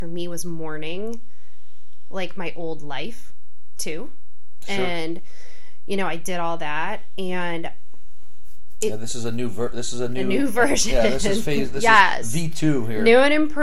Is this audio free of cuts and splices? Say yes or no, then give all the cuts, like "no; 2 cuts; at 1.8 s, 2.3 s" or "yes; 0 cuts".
yes; 0 cuts